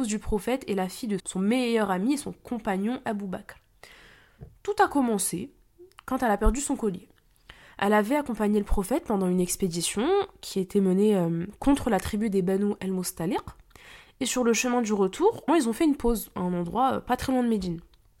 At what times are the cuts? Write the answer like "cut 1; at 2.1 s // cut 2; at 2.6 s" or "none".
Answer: cut 1; at 1.2 s // cut 2; at 15.5 s